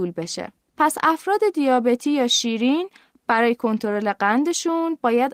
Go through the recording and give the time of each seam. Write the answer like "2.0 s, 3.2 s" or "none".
none